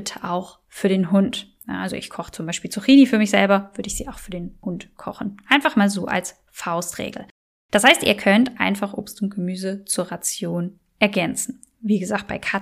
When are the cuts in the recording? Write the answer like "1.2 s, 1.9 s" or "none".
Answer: none

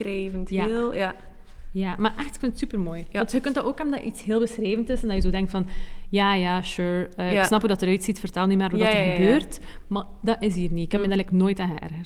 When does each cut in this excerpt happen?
none

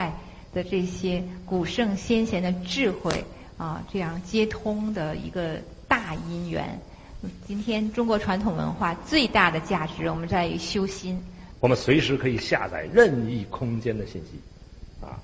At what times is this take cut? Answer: 11.5 s

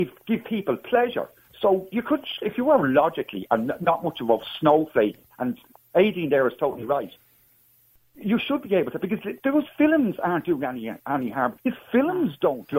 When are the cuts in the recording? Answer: 11.6 s

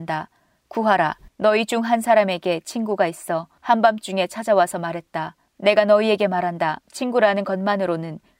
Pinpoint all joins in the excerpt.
1.3 s, 5.4 s

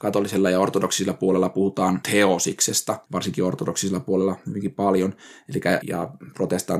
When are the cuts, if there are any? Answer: 3.0 s, 5.8 s

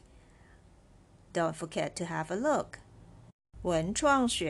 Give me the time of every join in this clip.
none

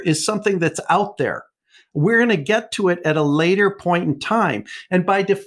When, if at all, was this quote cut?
none

